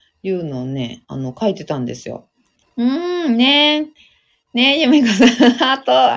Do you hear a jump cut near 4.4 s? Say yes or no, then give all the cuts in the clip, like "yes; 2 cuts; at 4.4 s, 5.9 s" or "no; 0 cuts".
no; 1 cut; at 2.6 s